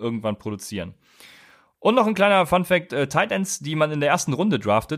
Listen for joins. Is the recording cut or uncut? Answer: uncut